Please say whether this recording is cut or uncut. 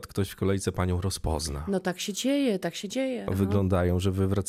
cut